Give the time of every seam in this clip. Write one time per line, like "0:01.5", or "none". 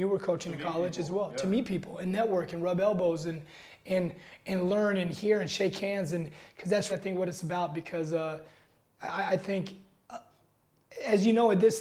0:06.9